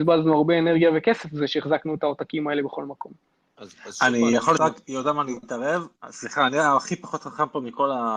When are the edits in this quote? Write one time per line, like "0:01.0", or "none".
0:04.6